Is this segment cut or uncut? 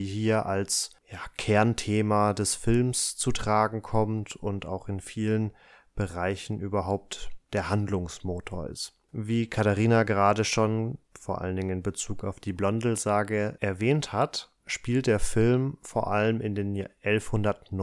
cut